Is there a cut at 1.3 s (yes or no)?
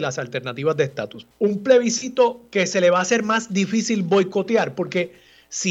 yes